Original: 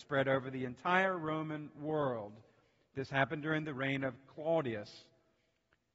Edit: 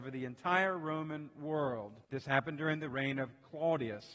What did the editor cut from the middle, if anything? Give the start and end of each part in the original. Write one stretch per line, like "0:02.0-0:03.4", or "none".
0:02.4-0:02.9